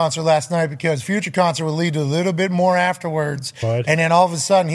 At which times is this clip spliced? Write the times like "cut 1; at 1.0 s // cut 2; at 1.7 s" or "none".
none